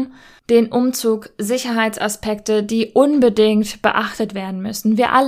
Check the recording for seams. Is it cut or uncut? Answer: uncut